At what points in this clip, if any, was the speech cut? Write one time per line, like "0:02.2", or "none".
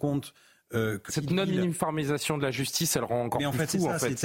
0:01.1

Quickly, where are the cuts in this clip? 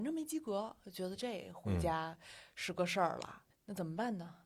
none

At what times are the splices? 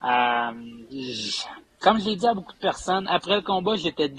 0:01.6

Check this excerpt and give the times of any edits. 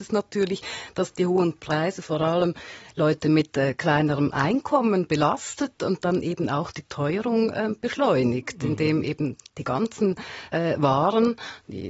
none

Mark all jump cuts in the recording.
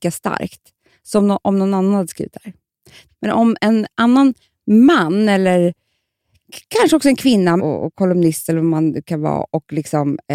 0:03.1
0:07.6

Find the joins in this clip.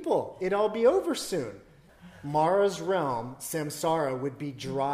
0:01.9

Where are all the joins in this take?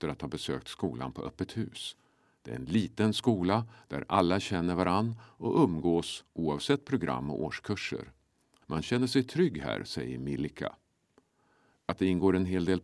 0:08.6

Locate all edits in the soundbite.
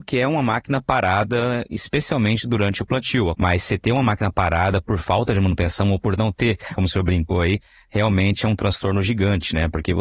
0:03.3
0:06.8

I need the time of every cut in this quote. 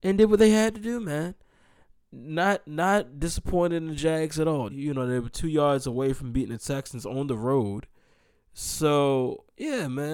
0:04.7

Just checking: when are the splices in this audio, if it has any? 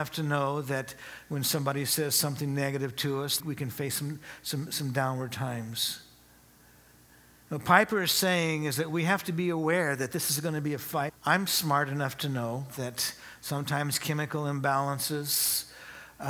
0:03.4
0:11.1
0:12.7

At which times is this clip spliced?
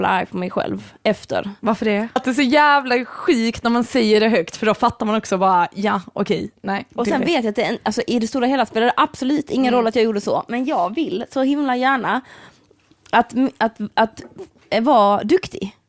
0:02.2

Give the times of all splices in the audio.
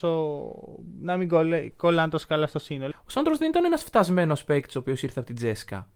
0:02.9

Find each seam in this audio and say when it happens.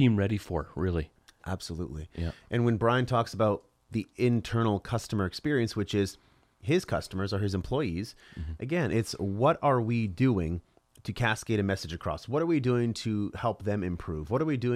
none

